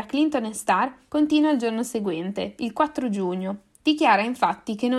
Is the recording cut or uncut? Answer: cut